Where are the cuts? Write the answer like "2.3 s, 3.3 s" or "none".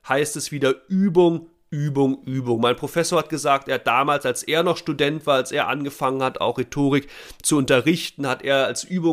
none